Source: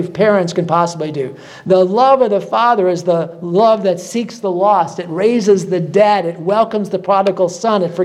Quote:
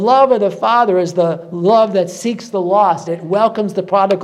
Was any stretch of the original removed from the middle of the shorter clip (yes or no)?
yes